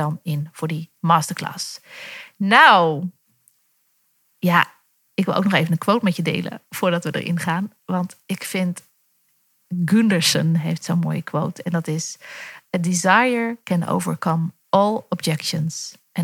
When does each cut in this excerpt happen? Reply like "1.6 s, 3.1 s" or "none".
none